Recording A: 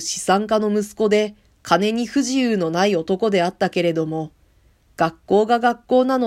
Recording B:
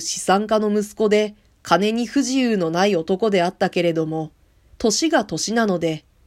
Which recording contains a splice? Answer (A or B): B